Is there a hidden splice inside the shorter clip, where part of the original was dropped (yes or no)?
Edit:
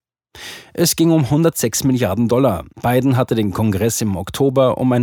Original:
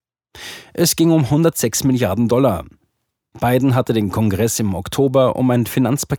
yes